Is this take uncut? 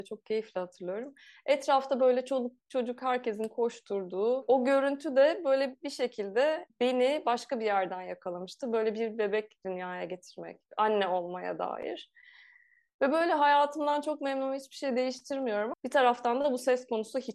no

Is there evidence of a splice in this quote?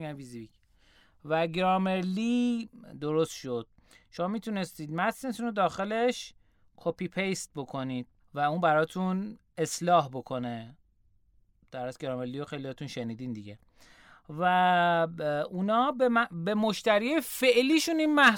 no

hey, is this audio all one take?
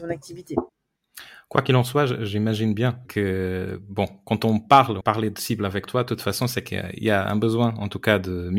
no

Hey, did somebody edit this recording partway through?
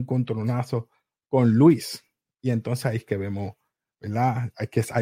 no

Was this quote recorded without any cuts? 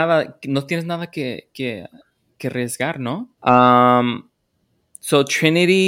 no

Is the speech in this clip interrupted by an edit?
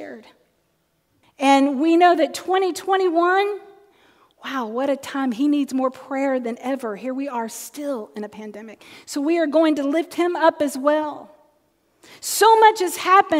yes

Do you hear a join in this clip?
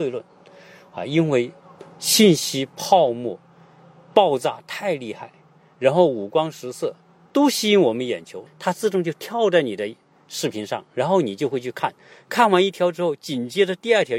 yes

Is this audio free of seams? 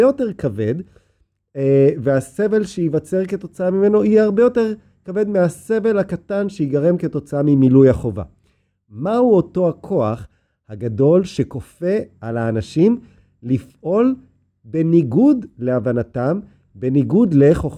yes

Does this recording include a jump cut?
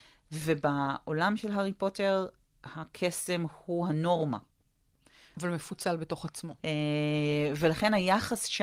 yes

